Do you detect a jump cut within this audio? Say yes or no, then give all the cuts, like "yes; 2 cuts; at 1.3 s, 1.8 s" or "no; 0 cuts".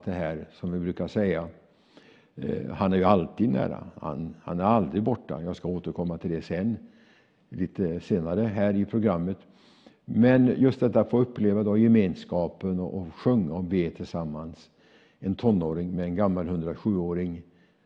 no; 0 cuts